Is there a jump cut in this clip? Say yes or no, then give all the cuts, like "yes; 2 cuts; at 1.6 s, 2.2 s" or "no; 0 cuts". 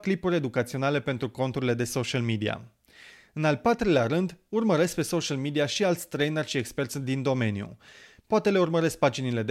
no; 0 cuts